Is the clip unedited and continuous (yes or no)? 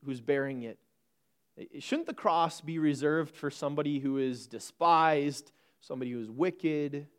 yes